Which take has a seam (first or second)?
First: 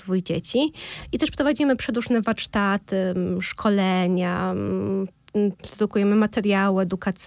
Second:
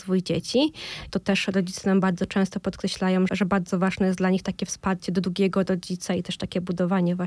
second